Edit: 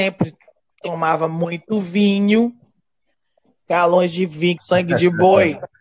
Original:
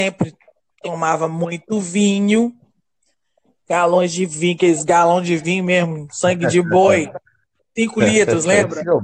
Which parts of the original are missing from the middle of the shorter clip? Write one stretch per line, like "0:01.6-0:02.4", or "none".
0:04.6-0:06.1